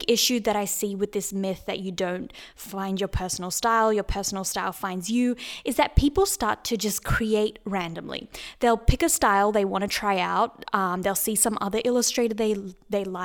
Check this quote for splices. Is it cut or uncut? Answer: uncut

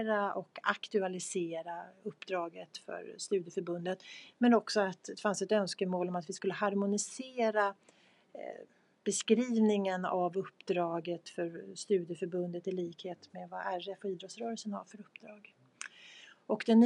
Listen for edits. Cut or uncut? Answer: uncut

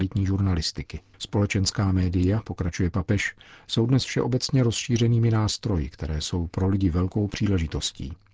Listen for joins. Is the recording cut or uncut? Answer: cut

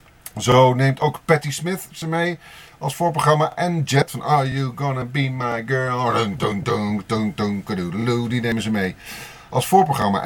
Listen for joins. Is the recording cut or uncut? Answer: uncut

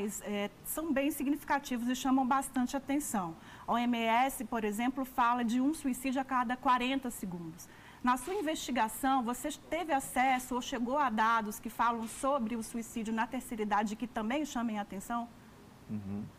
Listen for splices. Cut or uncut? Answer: uncut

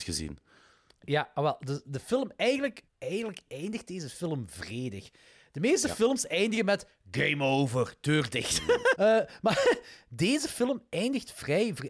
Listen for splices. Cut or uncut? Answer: cut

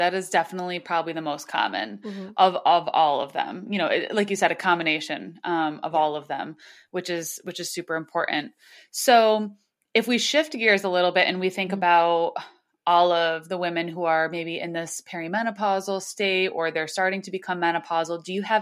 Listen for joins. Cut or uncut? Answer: uncut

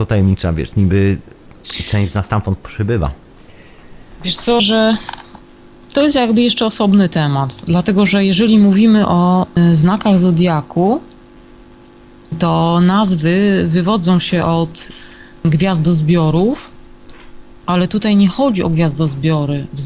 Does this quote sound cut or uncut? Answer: cut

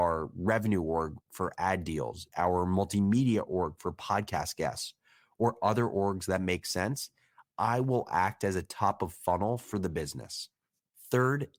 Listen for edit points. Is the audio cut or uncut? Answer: uncut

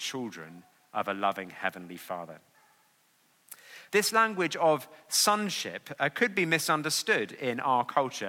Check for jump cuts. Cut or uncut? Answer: cut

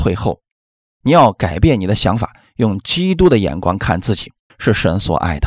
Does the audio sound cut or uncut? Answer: cut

